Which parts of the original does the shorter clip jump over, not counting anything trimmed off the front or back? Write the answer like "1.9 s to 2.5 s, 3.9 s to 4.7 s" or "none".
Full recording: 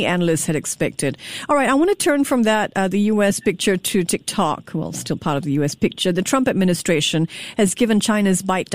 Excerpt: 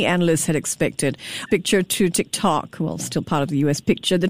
1.5 s to 3.4 s